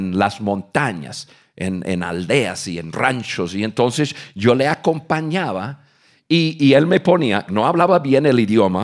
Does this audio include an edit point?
yes; 1 cut; at 7.5 s

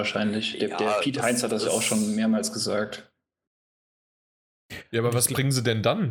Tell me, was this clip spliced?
no; 0 cuts

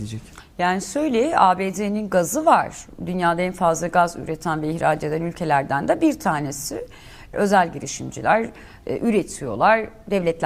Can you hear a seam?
yes; 1 cut; at 7.3 s

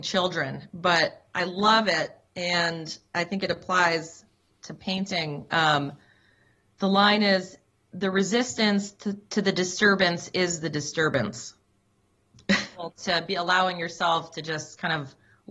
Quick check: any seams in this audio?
yes; 1 cut; at 12.7 s

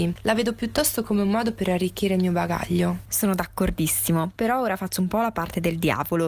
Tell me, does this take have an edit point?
no; 0 cuts

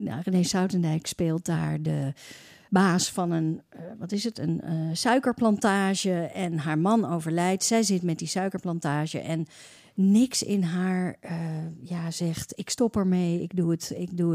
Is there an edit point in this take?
yes; 1 cut; at 2.7 s

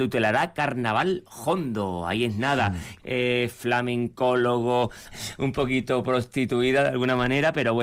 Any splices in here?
yes; 2 cuts; at 3.0 s, 5.1 s

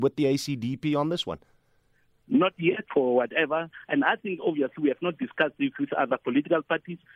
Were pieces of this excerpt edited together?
yes; 1 cut; at 2.9 s

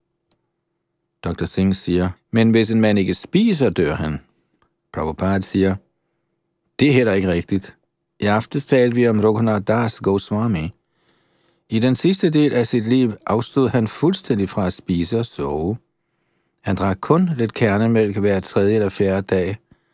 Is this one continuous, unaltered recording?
no; 1 cut; at 2.2 s

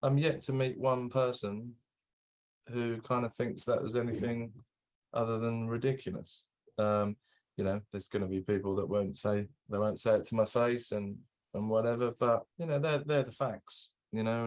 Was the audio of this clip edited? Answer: yes; 2 cuts; at 9.7 s, 12.5 s

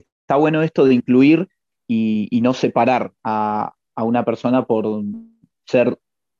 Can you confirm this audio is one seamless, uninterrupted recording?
yes; 0 cuts

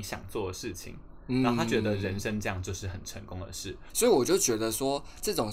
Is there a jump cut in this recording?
yes; 1 cut; at 3.9 s

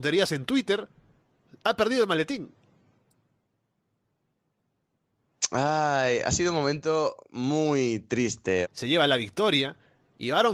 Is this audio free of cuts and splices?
no; 1 cut; at 8.6 s

